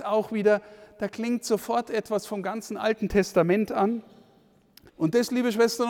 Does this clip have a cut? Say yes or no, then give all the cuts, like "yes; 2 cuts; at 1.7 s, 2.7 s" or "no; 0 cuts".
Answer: yes; 1 cut; at 4.9 s